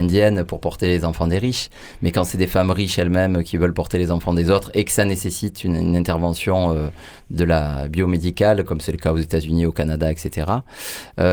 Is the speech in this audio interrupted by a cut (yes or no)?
no